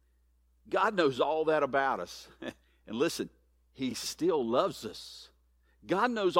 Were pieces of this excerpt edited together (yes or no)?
no